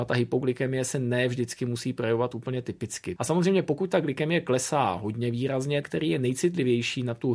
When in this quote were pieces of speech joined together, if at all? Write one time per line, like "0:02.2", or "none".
0:03.2
0:05.8